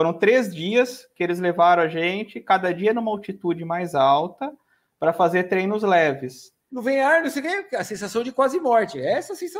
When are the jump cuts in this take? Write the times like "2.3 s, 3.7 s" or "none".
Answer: 6.7 s